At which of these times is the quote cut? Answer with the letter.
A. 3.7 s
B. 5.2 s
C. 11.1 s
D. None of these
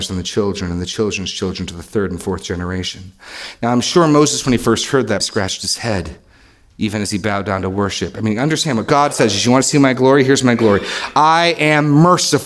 B